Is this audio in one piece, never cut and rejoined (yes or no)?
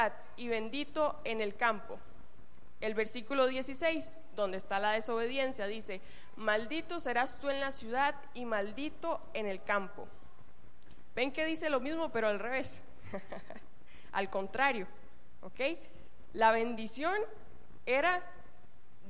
yes